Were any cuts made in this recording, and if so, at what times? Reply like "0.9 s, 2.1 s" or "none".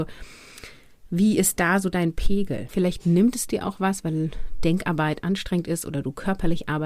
2.7 s